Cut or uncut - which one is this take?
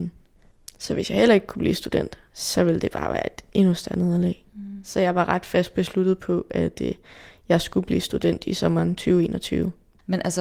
cut